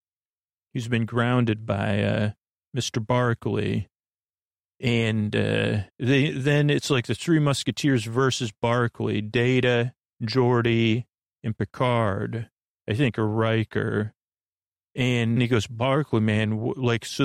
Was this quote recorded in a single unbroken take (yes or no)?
no